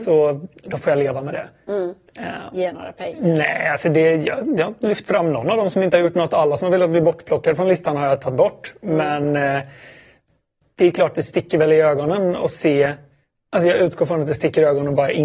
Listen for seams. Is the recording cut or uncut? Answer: cut